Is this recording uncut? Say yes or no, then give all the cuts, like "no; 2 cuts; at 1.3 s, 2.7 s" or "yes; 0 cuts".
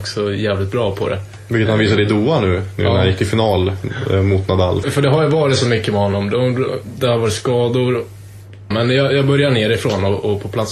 no; 2 cuts; at 4.8 s, 8.7 s